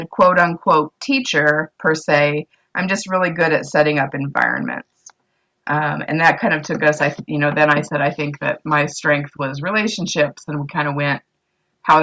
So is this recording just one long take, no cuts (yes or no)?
yes